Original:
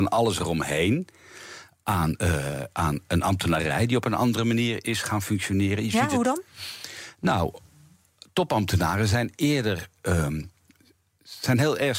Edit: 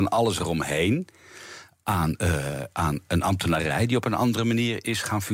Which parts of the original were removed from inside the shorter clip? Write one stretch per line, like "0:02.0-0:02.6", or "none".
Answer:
none